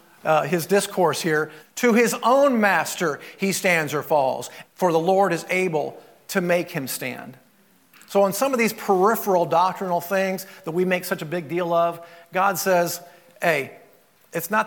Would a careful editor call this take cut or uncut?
cut